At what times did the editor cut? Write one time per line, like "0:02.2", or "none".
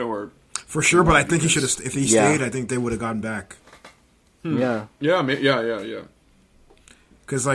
none